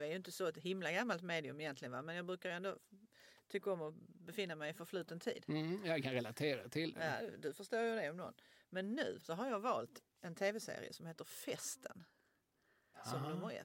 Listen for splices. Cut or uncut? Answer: cut